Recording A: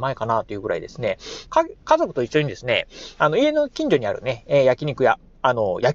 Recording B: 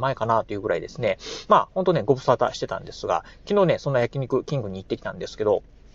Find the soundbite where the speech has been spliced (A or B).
A